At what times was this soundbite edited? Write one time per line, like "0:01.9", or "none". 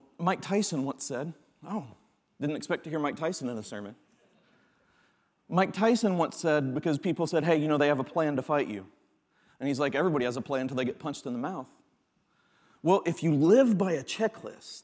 none